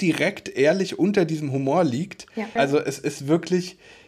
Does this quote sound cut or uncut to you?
cut